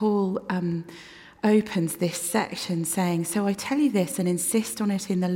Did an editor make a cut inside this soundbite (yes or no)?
no